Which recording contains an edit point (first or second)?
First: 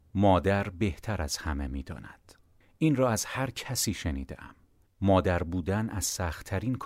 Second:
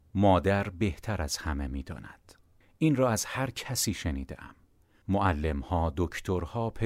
first